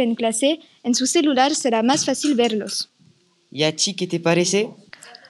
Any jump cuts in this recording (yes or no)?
no